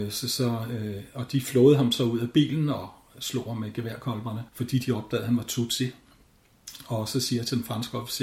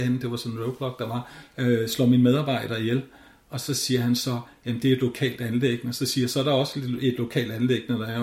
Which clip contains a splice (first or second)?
first